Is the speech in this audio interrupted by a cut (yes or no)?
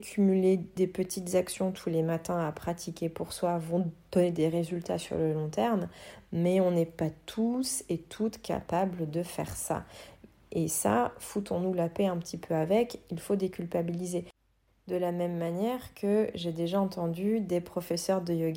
no